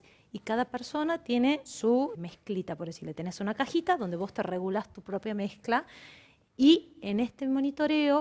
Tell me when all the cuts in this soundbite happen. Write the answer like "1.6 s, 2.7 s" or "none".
2.1 s